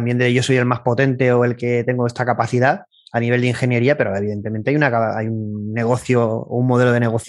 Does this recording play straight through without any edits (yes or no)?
yes